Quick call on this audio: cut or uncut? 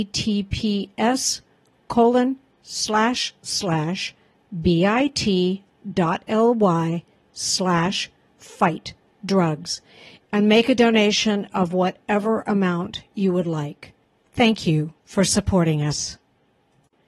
uncut